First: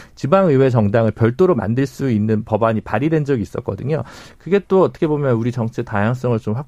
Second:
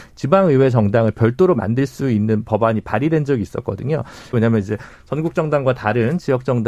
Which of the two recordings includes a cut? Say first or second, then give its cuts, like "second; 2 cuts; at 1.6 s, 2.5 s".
second; 1 cut; at 4.3 s